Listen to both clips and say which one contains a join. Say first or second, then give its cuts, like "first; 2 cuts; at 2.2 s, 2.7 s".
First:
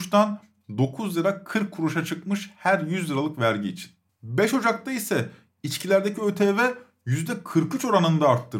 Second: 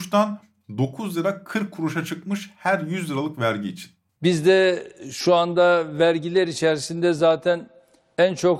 second; 1 cut; at 4.2 s